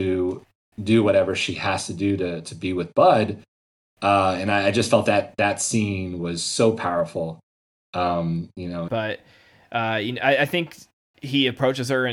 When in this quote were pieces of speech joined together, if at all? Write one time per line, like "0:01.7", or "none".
0:08.9